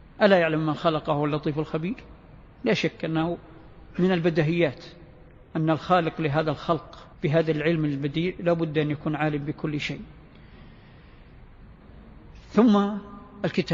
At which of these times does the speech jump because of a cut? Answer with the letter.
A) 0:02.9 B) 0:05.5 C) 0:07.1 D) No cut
C